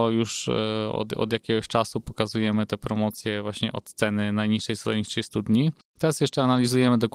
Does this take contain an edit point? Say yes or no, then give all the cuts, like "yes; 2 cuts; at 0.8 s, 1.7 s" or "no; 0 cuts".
no; 0 cuts